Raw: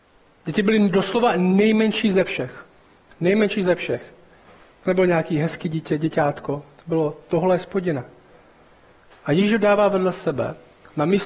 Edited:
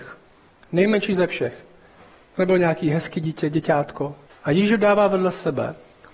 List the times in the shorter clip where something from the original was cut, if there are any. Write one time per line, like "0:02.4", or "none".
0:04.3